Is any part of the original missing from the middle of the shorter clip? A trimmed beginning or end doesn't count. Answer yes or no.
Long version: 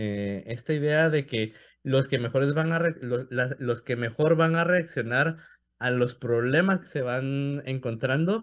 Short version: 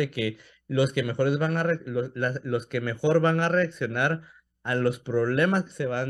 no